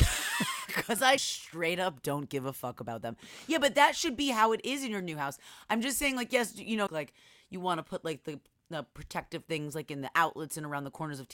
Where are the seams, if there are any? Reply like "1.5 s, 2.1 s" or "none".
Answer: 1.2 s, 6.9 s